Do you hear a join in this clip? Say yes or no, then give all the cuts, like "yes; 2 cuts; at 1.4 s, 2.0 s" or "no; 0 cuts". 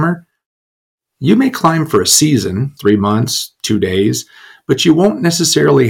yes; 1 cut; at 2.8 s